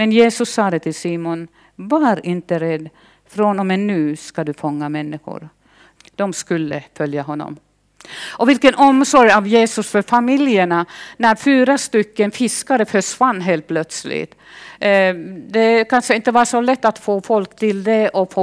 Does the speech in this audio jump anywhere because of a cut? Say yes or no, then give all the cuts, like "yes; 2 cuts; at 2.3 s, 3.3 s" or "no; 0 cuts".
yes; 1 cut; at 6.0 s